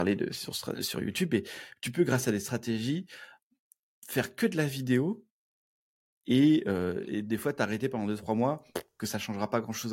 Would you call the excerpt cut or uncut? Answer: uncut